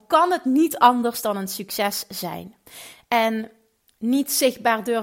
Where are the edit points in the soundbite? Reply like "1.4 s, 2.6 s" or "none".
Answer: none

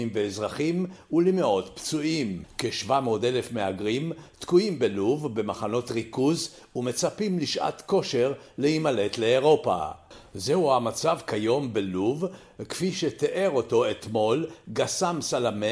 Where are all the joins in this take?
none

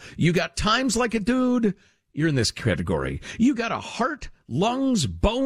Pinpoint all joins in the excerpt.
none

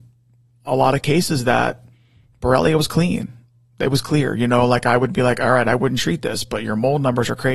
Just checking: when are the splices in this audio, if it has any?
none

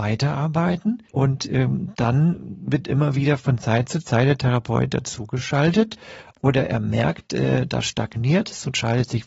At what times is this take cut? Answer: 1.1 s

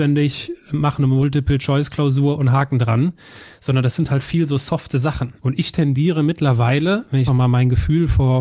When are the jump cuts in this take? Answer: 5.4 s, 7.3 s

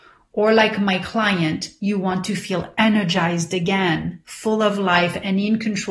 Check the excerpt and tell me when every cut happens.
none

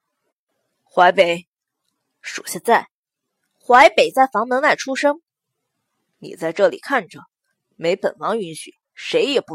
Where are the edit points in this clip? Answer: none

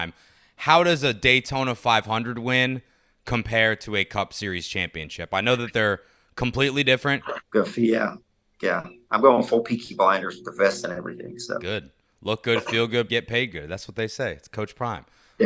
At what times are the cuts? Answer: 7.4 s, 13.1 s

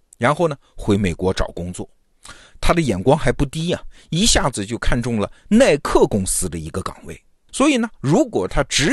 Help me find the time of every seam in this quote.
7.5 s

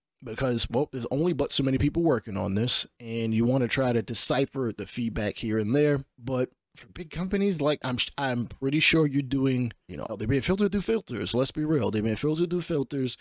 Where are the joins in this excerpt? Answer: 7.8 s, 10.1 s

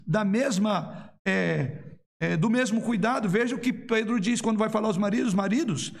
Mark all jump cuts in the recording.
none

